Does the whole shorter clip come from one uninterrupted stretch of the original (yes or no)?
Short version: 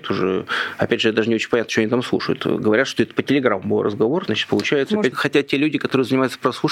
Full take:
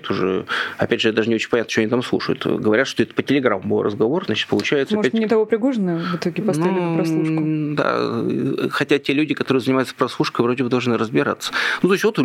no